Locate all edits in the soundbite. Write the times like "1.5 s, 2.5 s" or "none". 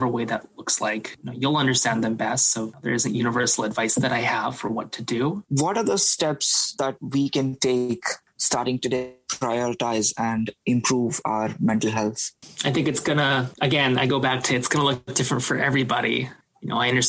none